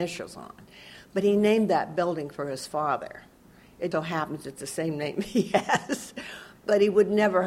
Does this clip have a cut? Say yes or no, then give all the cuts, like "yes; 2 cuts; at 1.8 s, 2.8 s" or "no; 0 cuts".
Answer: yes; 1 cut; at 3.9 s